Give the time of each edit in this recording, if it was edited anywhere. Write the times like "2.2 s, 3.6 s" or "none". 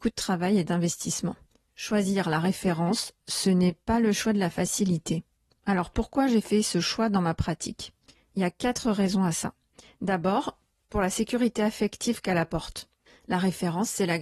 none

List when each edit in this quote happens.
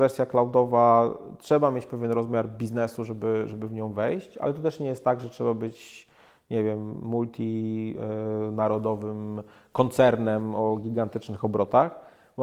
none

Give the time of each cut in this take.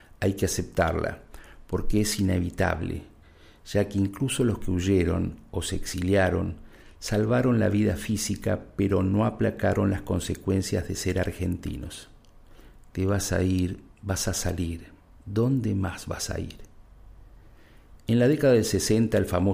15.2 s

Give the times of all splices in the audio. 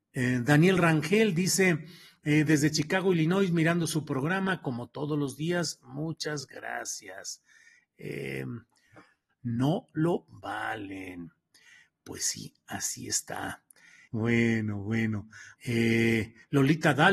9.3 s, 14.1 s, 15.5 s

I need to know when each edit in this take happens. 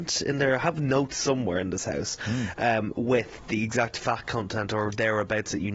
none

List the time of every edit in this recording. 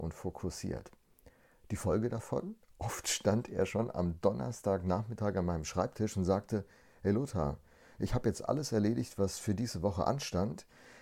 none

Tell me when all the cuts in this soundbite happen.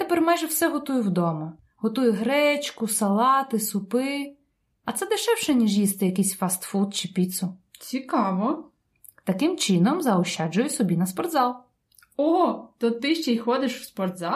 none

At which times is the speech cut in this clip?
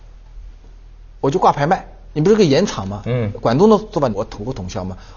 2.1 s, 4.1 s

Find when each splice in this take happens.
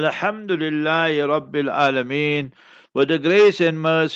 2.8 s

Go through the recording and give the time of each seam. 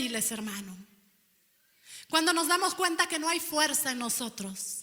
none

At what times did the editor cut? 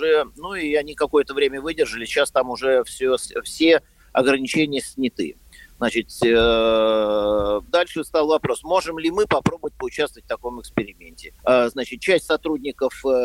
7.7 s, 11.4 s

